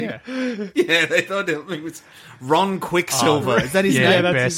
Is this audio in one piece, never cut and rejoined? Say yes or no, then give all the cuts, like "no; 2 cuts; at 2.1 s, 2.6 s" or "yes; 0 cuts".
yes; 0 cuts